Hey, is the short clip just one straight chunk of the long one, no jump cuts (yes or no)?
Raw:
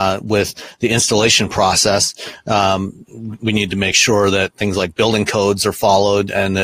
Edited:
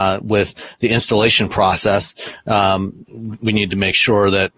yes